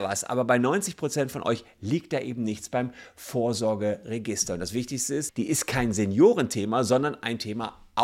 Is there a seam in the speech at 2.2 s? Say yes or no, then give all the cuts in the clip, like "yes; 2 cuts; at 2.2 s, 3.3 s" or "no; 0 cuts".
no; 1 cut; at 5.3 s